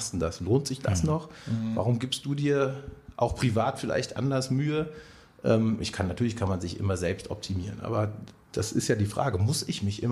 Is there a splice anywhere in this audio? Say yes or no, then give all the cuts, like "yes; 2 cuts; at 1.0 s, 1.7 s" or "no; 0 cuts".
no; 0 cuts